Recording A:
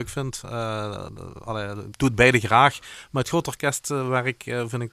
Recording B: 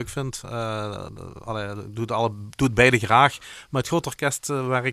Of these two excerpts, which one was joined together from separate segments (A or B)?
A